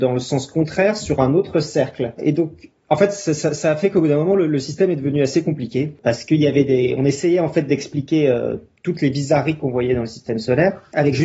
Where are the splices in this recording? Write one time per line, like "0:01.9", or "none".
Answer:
0:02.2